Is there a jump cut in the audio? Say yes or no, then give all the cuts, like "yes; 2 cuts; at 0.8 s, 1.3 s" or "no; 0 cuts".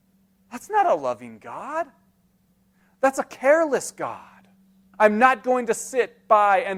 yes; 1 cut; at 4.9 s